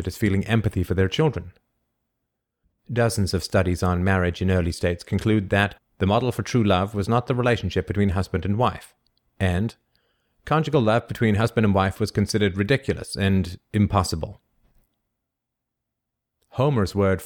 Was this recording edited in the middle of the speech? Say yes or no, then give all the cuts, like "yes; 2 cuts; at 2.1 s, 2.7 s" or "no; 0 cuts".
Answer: yes; 2 cuts; at 2.8 s, 5.8 s